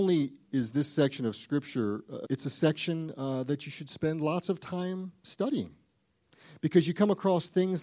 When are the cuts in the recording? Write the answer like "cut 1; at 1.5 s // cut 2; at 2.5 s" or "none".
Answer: cut 1; at 2.2 s